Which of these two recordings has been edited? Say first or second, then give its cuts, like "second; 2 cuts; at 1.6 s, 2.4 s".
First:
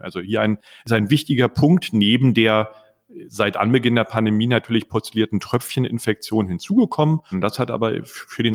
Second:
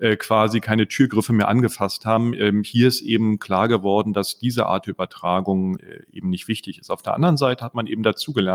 first; 1 cut; at 7.3 s